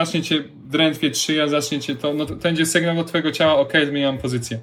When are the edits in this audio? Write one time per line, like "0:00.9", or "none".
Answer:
0:02.3